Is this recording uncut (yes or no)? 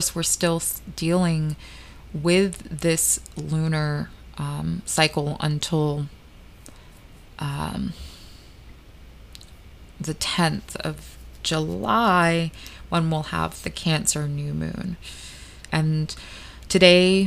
no